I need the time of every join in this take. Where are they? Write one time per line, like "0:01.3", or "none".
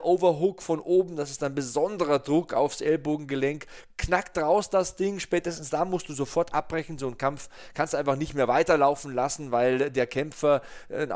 none